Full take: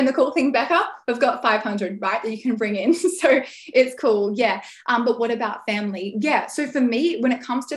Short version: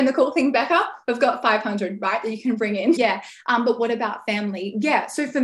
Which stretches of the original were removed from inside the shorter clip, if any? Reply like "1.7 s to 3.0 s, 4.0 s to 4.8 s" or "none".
3.0 s to 4.4 s